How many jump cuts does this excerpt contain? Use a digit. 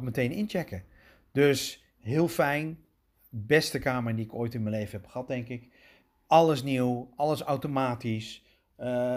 1